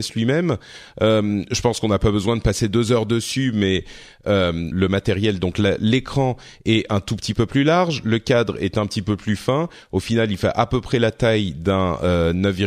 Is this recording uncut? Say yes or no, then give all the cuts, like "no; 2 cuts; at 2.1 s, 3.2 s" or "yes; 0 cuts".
no; 1 cut; at 4.7 s